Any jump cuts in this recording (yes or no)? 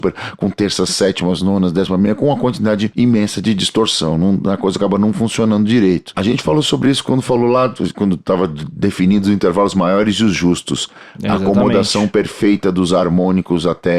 yes